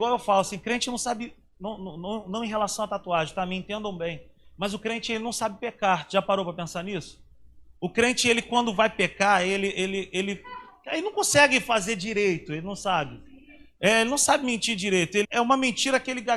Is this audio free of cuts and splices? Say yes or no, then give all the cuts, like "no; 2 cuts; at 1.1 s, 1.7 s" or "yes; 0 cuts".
no; 1 cut; at 15.2 s